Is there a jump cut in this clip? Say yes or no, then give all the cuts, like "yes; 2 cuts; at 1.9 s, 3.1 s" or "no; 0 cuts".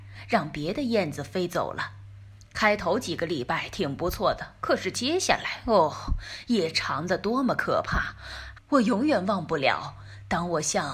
yes; 1 cut; at 8.5 s